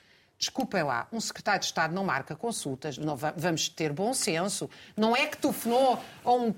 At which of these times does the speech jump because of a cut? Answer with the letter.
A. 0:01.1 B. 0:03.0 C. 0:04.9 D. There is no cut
B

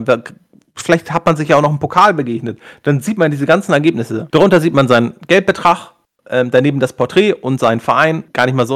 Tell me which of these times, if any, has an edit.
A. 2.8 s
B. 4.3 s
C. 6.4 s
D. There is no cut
B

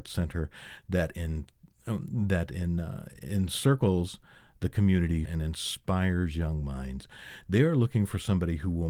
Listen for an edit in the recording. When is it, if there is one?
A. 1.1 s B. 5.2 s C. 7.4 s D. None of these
B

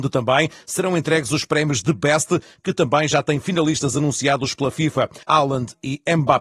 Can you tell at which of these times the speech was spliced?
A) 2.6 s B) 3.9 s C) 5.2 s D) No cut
C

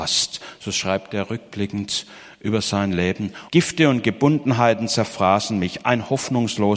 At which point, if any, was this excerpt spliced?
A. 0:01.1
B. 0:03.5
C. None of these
B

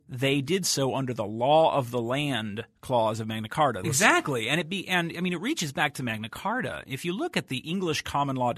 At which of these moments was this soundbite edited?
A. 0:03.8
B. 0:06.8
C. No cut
A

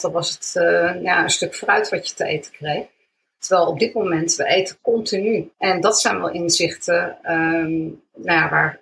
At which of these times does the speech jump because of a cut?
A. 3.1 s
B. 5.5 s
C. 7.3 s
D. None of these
B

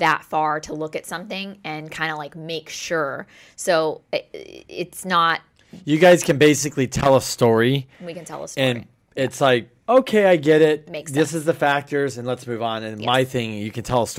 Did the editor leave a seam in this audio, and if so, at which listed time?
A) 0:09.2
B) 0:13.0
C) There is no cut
C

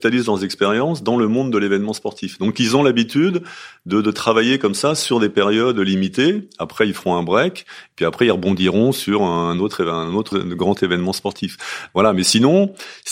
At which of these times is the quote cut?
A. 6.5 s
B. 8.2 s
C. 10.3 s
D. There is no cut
C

